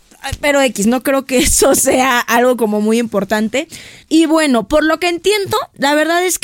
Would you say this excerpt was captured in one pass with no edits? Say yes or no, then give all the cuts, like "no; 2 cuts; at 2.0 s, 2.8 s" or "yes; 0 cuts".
no; 1 cut; at 4.0 s